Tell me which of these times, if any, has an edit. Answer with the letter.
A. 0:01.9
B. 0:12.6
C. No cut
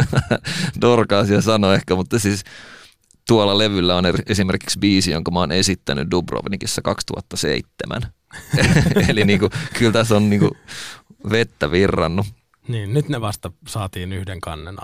C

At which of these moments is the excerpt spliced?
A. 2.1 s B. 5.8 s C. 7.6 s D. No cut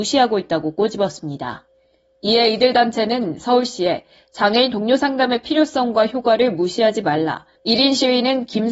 C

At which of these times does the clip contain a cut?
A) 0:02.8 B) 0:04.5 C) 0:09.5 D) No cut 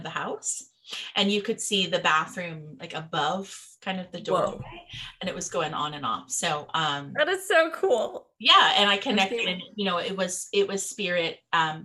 A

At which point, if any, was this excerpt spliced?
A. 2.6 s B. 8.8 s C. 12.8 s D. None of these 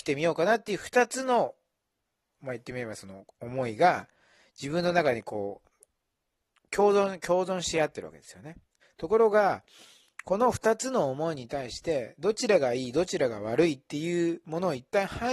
B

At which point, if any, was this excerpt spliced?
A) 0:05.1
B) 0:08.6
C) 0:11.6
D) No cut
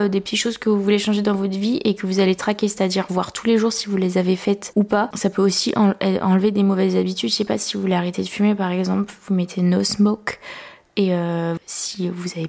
C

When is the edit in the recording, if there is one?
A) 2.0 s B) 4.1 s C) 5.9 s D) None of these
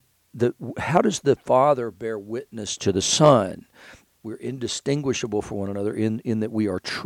B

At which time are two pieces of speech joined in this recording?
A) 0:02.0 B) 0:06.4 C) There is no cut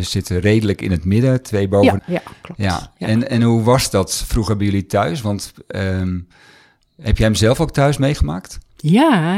A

